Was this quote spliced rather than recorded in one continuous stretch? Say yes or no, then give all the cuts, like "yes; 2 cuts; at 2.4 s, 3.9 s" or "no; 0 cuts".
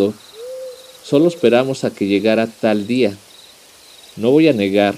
no; 0 cuts